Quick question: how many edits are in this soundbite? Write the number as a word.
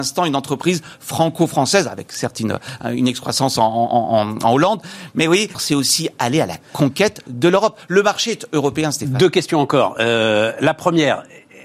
one